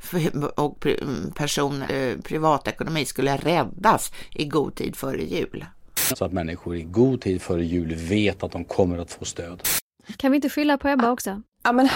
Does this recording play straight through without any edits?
no; 3 cuts; at 1.9 s, 6.1 s, 10.1 s

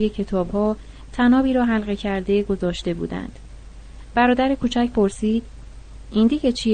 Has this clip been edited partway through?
no; 0 cuts

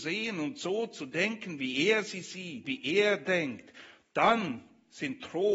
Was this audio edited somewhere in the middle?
yes; 1 cut; at 2.6 s

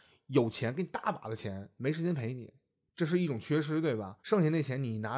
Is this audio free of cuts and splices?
no; 1 cut; at 4.2 s

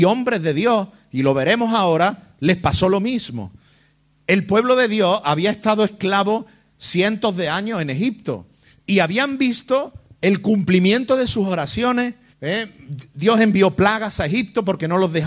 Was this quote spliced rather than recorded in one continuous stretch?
yes; 1 cut; at 12.3 s

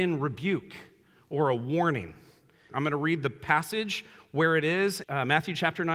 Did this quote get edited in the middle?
yes; 2 cuts; at 2.7 s, 5.0 s

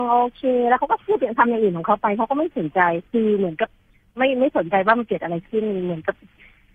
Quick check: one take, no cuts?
no; 1 cut; at 3.1 s

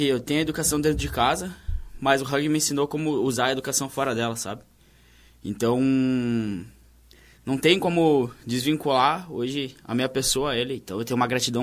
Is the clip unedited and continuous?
yes; 0 cuts

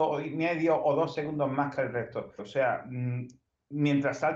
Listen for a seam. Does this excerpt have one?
yes; 1 cut; at 2.4 s

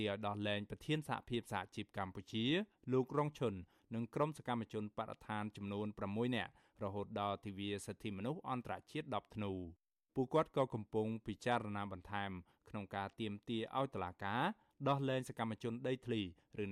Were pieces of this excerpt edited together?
no; 0 cuts

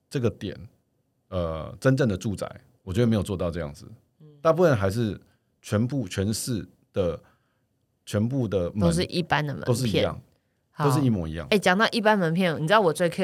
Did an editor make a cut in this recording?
no; 0 cuts

